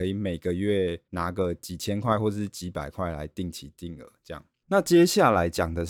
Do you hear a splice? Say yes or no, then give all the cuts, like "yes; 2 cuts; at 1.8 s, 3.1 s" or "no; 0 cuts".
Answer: yes; 1 cut; at 4.6 s